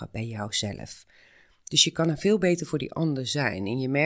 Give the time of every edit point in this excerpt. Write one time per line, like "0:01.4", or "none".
none